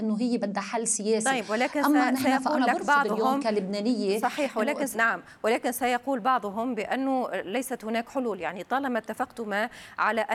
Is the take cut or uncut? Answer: cut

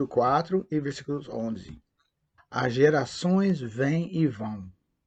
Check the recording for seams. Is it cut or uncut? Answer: cut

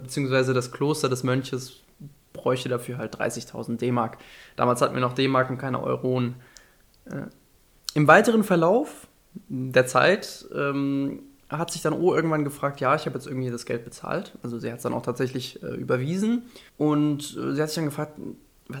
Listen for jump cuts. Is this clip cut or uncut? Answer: cut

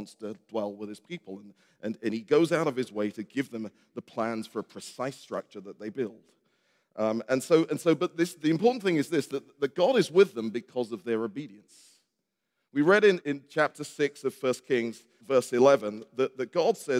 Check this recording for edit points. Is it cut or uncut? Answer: cut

